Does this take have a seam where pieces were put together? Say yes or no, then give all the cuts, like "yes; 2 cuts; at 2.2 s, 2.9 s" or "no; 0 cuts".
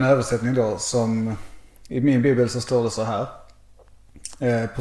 no; 0 cuts